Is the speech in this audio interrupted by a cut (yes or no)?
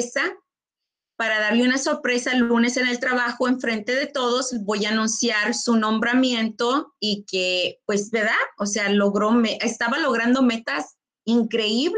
no